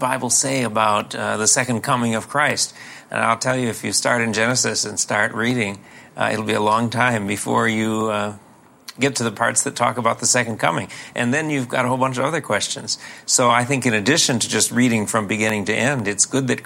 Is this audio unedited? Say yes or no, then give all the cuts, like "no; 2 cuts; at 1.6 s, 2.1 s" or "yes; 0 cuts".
yes; 0 cuts